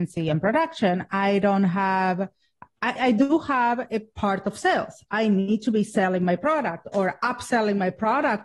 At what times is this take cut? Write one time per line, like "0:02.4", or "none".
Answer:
0:03.0